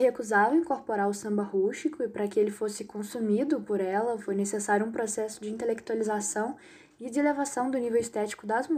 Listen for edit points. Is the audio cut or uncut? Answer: uncut